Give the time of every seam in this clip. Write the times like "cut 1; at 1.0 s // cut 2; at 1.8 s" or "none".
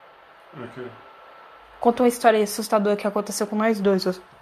none